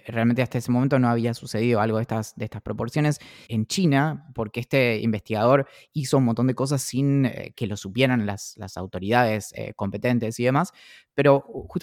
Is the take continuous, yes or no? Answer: no